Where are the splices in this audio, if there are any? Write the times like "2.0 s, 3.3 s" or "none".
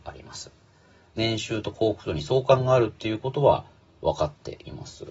1.1 s